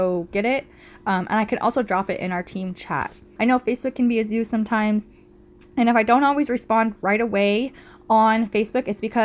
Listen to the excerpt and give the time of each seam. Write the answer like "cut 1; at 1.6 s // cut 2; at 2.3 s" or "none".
cut 1; at 3.4 s